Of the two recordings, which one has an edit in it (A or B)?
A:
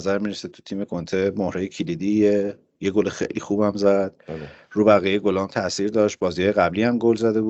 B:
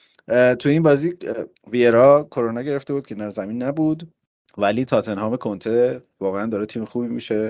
B